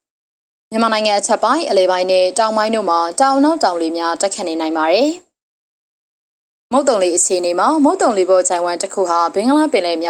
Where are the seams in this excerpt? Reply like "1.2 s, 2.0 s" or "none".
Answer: none